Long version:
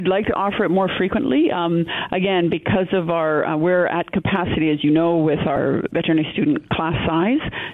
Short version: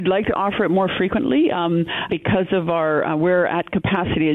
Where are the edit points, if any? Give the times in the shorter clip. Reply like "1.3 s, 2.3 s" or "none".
2.1 s